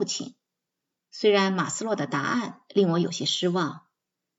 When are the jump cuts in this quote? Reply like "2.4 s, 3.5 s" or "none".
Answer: 1.0 s